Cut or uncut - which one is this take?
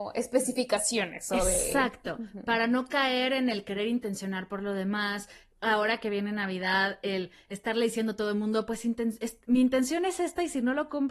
uncut